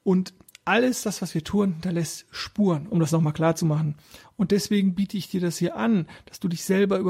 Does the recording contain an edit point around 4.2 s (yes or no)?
yes